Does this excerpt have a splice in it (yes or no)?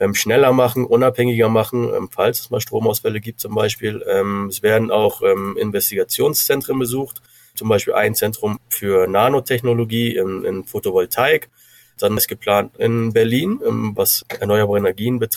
yes